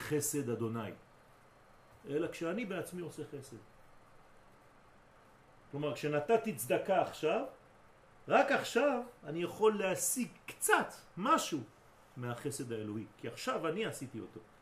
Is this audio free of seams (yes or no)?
yes